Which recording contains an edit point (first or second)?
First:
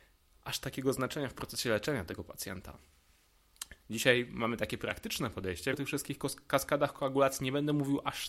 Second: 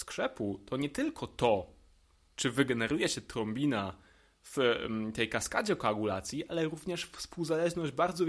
first